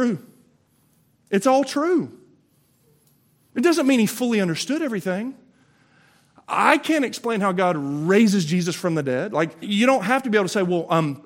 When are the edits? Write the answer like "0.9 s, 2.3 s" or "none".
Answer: 9.6 s